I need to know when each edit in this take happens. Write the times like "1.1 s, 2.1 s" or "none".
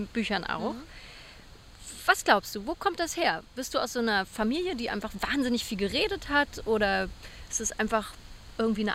none